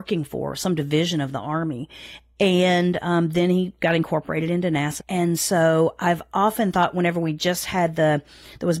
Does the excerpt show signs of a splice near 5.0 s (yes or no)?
yes